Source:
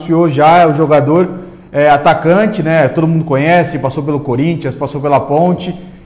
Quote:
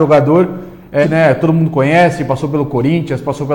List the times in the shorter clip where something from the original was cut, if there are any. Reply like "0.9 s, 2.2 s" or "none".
1.0 s

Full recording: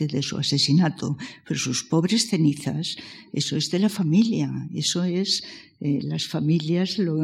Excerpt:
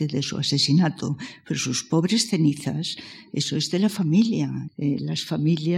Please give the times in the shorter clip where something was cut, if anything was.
4.7 s

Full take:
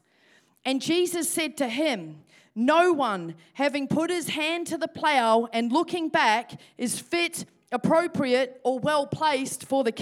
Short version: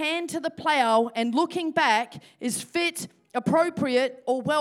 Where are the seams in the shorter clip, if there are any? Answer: none

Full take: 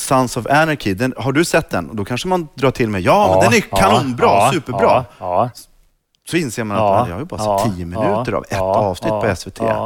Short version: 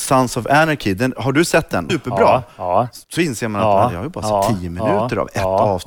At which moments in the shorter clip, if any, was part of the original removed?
1.9 s, 3.0 s

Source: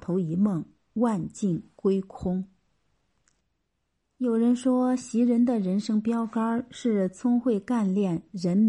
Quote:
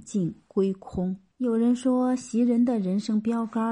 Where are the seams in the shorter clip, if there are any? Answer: 1.3 s

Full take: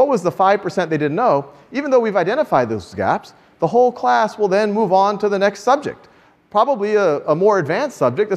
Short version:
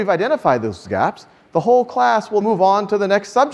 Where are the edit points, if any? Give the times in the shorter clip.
2.4 s

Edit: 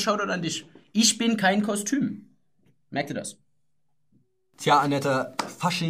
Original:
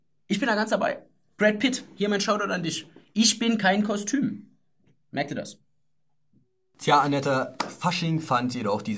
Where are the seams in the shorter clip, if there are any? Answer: none

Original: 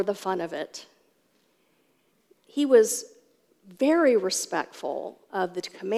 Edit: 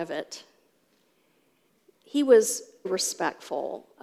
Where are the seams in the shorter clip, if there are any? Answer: 2.8 s

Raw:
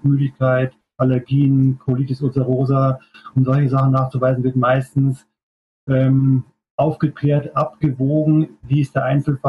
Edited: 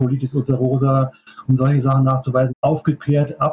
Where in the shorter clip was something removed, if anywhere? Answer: 2.5 s

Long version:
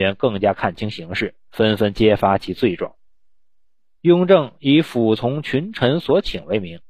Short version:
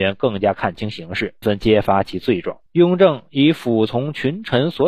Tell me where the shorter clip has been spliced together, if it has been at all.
1.4 s, 2.7 s

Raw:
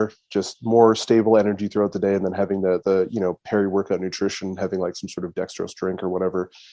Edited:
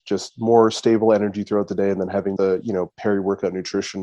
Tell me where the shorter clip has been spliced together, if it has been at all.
2.4 s

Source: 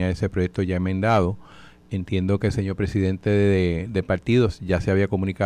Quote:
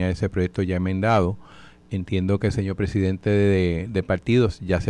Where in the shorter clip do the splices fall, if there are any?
none

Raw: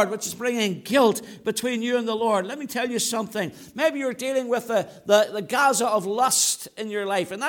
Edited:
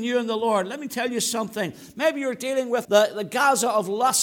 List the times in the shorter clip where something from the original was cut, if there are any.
2.8 s

